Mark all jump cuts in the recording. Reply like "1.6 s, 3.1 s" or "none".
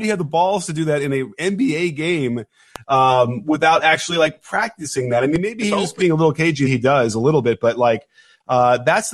6.7 s